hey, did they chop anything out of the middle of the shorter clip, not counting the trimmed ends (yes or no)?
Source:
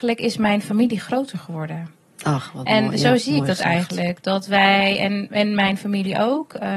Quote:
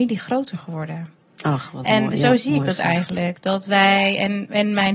no